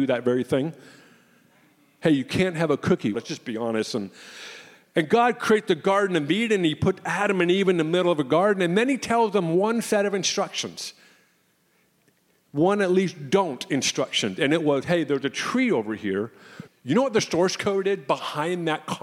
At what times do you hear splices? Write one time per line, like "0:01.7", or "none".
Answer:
0:03.1
0:16.7